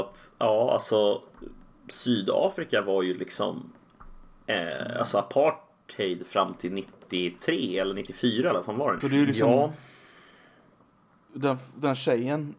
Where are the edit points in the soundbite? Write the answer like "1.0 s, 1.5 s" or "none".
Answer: 9.0 s